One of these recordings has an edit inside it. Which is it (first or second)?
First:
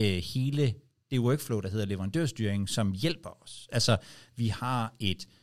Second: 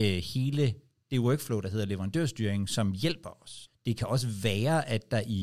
second